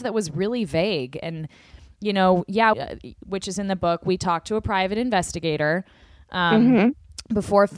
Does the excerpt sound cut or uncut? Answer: cut